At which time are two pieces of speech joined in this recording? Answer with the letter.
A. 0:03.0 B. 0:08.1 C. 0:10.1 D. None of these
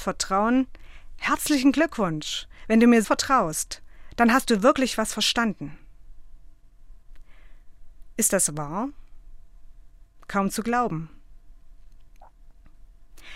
A